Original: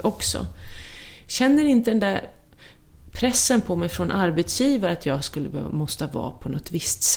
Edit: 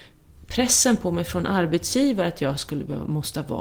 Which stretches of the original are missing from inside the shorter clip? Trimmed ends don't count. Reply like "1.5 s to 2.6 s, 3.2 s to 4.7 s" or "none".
none